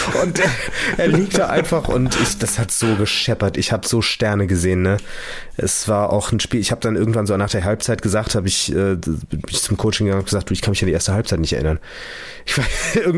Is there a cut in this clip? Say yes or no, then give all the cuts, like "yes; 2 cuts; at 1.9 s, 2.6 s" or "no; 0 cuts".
no; 0 cuts